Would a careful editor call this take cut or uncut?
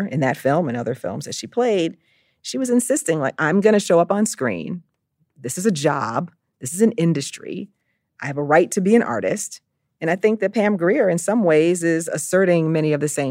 uncut